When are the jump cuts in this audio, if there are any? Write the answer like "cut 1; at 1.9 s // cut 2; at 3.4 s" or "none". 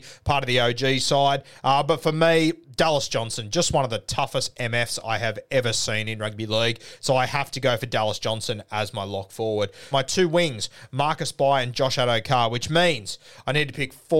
cut 1; at 9.9 s

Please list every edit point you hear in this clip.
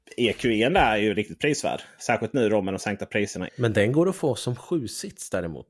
cut 1; at 2.0 s // cut 2; at 3.5 s

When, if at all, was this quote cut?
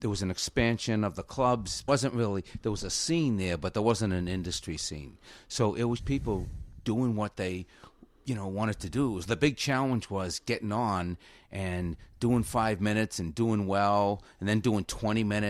cut 1; at 1.9 s // cut 2; at 6.0 s // cut 3; at 9.2 s

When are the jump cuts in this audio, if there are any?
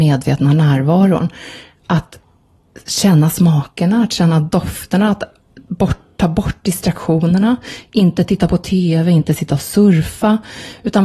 none

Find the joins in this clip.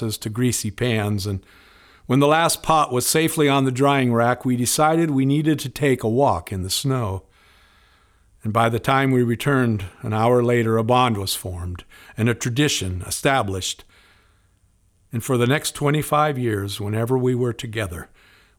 none

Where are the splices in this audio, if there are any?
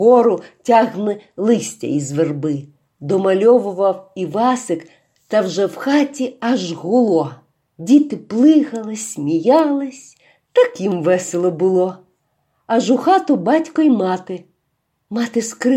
none

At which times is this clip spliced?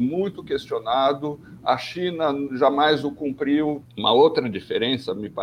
cut 1; at 3.8 s

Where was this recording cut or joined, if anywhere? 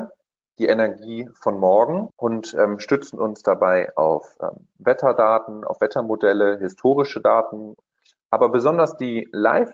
none

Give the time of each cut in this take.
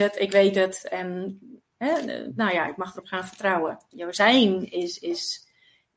cut 1; at 3.9 s

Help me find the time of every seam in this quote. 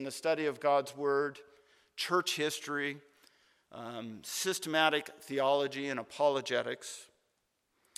none

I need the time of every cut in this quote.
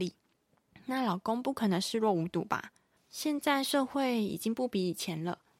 cut 1; at 3.0 s

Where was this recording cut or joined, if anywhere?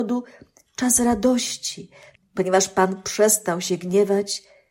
cut 1; at 2.1 s

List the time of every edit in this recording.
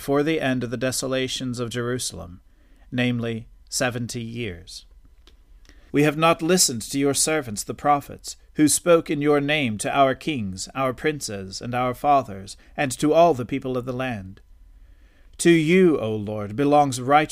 cut 1; at 5.9 s

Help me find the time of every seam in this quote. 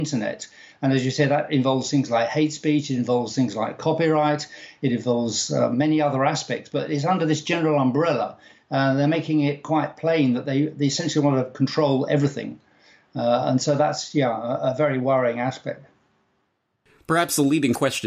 none

